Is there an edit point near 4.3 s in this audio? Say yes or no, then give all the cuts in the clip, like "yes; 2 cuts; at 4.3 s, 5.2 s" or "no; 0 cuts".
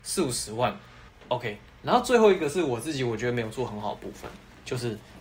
no; 1 cut; at 1.1 s